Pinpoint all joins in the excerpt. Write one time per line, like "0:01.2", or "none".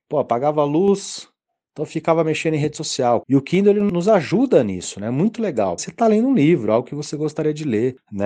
0:03.2
0:05.8